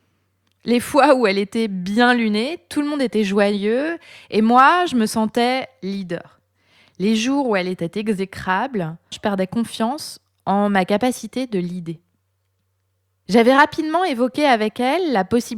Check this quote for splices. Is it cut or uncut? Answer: cut